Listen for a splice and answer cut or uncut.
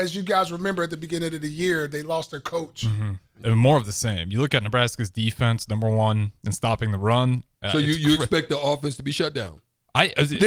cut